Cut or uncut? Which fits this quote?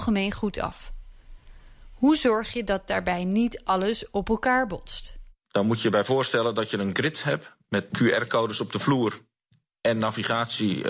cut